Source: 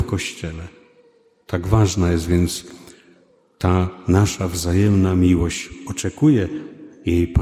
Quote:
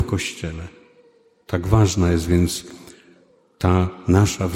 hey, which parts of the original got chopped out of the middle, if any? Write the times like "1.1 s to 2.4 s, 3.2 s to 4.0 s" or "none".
none